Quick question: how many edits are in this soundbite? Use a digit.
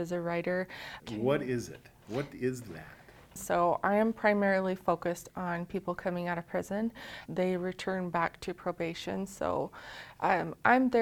3